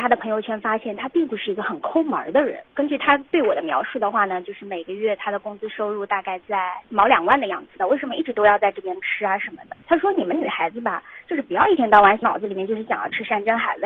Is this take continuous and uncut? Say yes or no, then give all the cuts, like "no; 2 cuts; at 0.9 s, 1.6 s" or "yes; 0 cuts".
no; 2 cuts; at 7.8 s, 9.8 s